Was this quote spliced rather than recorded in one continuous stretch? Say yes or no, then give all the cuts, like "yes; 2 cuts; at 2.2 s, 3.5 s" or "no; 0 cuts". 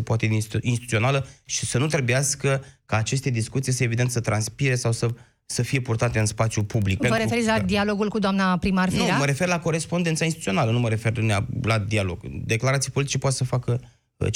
no; 0 cuts